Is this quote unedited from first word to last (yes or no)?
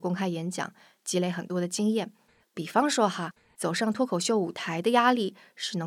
no